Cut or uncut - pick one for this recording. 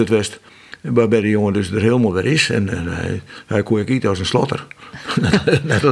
uncut